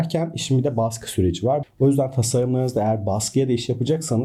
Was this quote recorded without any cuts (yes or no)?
no